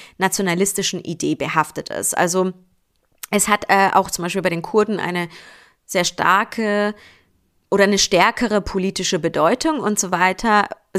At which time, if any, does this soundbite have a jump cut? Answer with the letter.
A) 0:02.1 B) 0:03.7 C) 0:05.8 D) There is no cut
D